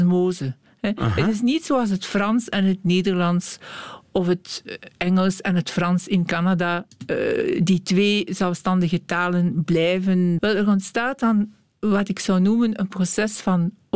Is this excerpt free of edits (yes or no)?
no